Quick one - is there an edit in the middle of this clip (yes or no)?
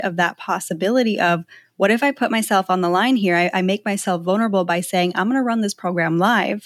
no